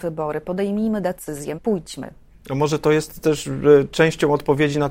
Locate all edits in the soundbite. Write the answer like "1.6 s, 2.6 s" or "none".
1.5 s